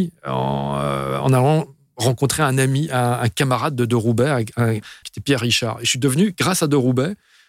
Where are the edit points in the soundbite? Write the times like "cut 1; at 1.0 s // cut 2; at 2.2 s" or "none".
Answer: cut 1; at 5.0 s